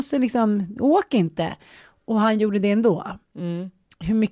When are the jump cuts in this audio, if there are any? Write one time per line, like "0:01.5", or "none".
none